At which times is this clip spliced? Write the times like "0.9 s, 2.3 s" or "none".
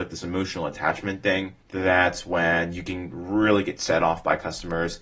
1.6 s